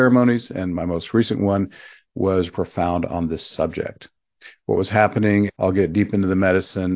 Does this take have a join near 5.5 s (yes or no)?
yes